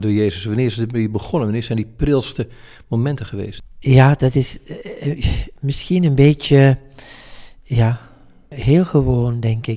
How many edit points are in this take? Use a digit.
0